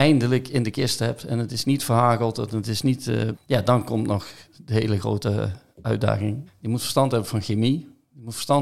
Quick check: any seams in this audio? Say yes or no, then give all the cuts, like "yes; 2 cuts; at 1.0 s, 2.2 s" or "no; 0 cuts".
yes; 2 cuts; at 3.3 s, 6.5 s